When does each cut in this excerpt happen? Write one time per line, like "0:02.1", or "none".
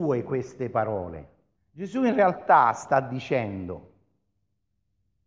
0:01.6